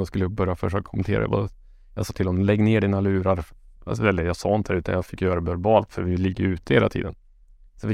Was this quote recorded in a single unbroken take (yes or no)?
yes